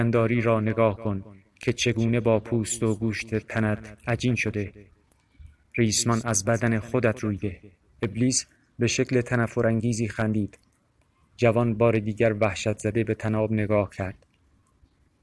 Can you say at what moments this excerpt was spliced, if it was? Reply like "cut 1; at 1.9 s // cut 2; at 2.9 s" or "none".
cut 1; at 7.9 s